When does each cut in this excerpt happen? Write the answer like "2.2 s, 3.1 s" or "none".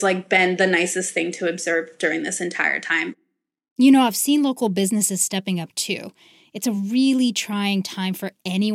none

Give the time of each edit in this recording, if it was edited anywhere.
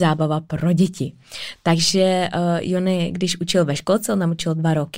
none

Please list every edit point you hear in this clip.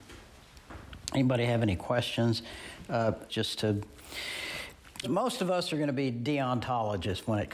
3.3 s, 5.0 s

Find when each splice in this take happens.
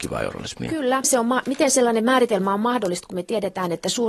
1.0 s

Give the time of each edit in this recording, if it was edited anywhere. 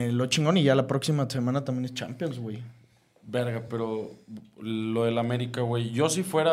none

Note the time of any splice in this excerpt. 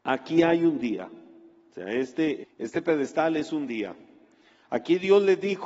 2.4 s

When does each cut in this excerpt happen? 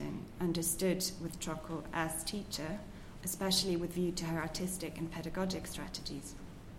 3.2 s

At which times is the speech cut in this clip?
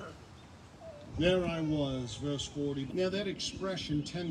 1.1 s, 2.9 s

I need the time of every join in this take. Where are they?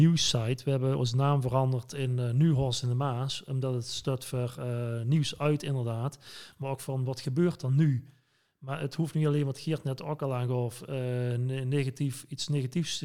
none

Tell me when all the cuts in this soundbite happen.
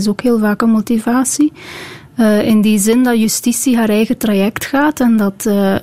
none

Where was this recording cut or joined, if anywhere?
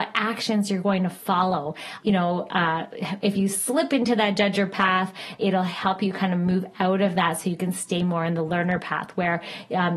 2.0 s, 5.4 s

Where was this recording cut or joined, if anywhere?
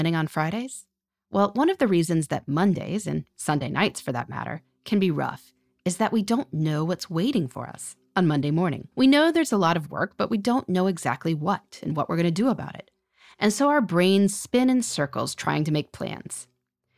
8.9 s

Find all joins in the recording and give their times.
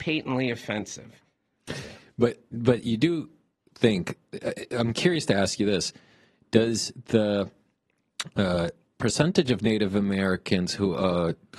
none

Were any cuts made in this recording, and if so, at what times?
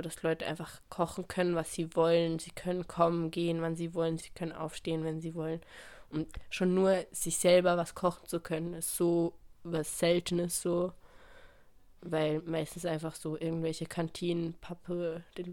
4.2 s

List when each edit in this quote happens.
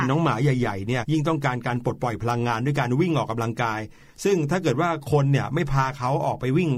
1.0 s

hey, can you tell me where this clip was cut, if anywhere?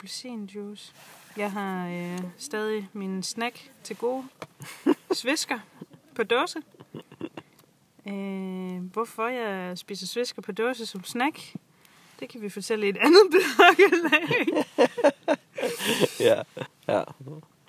16.7 s

